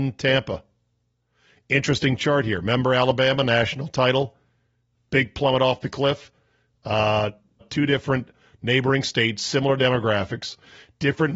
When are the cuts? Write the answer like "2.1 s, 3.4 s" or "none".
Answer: 7.6 s

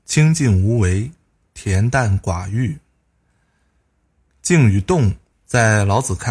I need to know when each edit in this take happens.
5.3 s

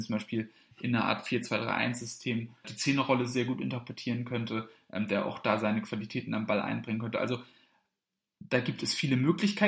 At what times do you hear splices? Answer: 2.6 s

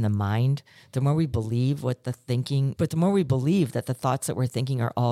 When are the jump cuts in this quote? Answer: 2.8 s

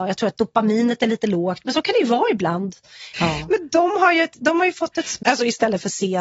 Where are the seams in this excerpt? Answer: 3.1 s, 5.2 s

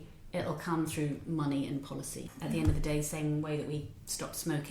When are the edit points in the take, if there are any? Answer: none

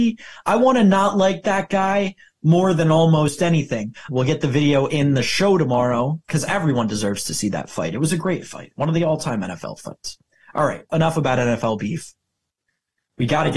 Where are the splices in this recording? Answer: 4.1 s, 10.9 s

